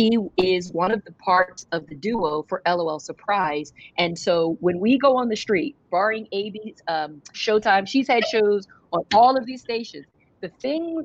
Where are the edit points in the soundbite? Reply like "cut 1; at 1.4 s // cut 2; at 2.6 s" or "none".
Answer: cut 1; at 5.9 s // cut 2; at 7.3 s